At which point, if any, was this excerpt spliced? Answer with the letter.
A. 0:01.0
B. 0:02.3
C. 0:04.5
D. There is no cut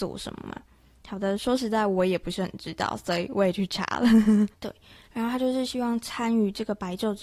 C